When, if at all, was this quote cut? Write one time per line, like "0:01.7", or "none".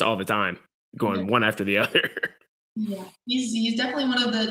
none